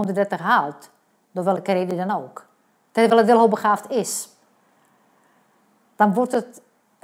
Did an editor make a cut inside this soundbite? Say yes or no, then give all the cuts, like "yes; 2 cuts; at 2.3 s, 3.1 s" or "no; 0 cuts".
no; 0 cuts